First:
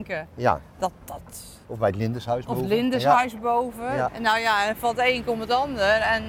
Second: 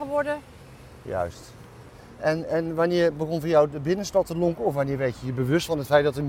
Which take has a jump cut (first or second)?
first